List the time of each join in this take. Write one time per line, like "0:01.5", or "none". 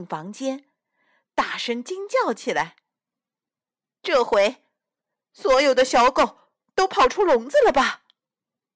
none